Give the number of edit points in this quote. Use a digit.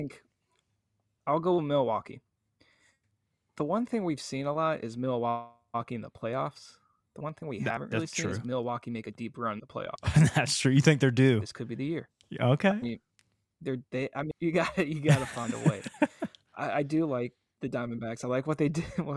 1